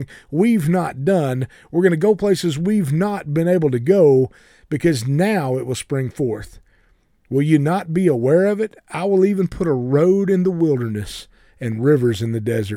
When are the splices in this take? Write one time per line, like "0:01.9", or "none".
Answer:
none

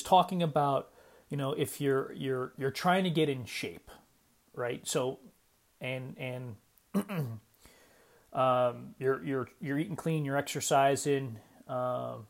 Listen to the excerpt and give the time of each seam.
none

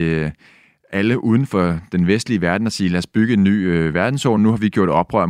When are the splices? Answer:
none

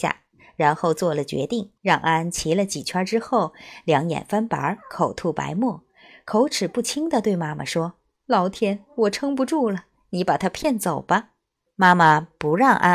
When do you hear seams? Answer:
0:01.8
0:11.7

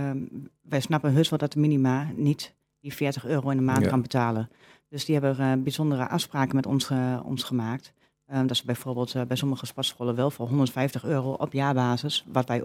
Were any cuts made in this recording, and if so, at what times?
none

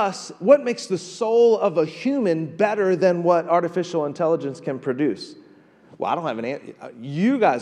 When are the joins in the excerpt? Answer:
none

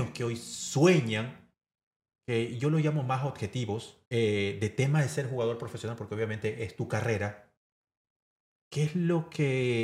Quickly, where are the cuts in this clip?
0:04.1

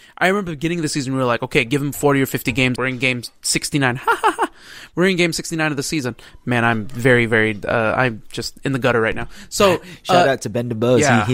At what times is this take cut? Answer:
0:02.8

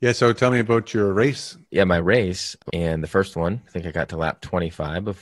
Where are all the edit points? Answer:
0:02.7

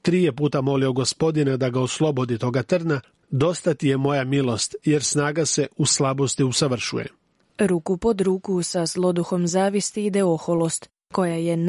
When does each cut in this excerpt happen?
0:03.2
0:07.4

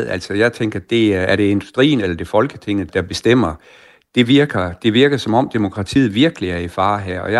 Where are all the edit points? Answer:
0:02.9

